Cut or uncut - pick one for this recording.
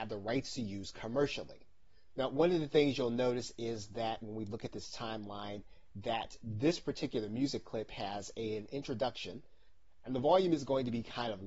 cut